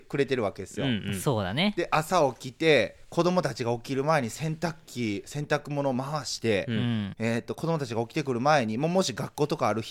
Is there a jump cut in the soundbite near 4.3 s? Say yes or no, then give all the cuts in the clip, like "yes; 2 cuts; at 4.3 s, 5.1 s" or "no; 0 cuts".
no; 1 cut; at 7.1 s